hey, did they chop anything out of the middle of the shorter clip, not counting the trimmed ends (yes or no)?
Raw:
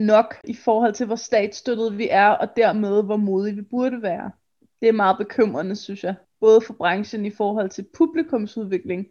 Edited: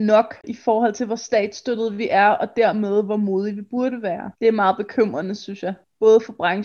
yes